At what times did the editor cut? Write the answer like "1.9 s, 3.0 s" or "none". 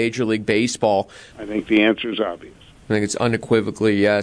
1.3 s